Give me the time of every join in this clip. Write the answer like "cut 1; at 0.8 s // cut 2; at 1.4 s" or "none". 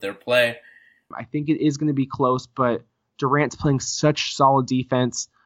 cut 1; at 1.1 s